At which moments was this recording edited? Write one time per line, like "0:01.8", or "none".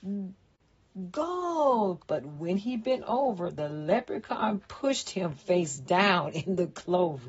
0:02.0